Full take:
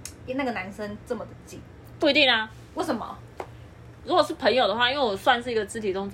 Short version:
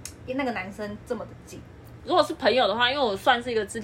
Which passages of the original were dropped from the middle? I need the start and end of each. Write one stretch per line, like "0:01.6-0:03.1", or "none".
0:02.0-0:04.0